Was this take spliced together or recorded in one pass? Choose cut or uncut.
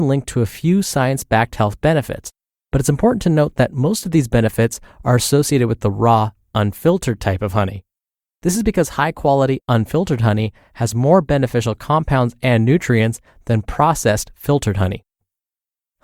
uncut